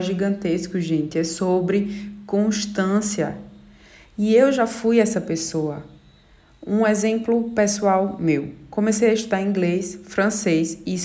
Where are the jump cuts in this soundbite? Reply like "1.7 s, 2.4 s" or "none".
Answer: none